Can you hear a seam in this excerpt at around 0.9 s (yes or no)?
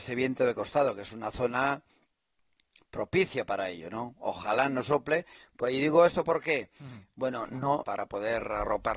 no